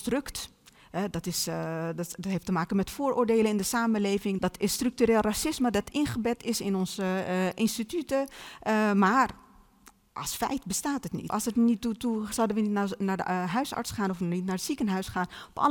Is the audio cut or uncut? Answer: cut